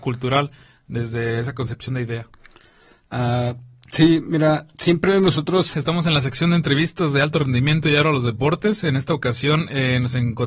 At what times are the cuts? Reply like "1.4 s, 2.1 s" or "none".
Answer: 5.7 s